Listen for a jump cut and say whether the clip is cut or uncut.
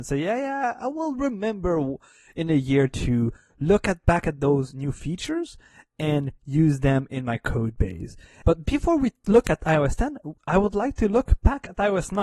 cut